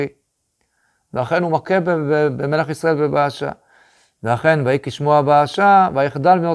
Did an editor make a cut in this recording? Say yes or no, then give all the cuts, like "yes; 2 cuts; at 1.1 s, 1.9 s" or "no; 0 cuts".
no; 0 cuts